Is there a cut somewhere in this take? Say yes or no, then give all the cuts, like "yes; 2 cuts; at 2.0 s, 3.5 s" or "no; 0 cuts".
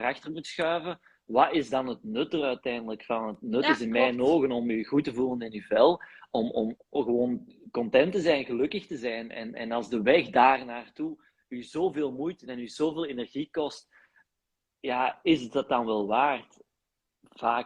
yes; 1 cut; at 6.8 s